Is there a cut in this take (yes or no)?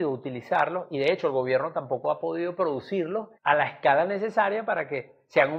yes